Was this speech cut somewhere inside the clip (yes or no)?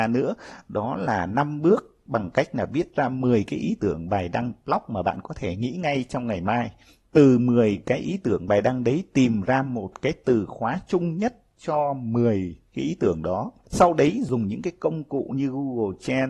no